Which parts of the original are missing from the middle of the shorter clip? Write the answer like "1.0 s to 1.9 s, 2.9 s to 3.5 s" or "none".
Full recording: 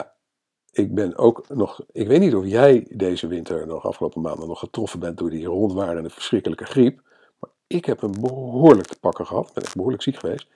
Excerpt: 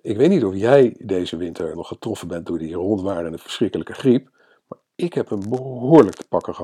3.7 s to 4.5 s